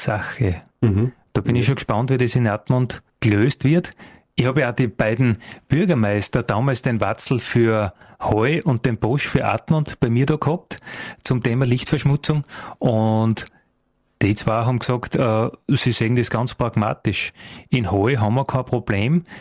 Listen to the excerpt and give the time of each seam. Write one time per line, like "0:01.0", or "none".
0:03.1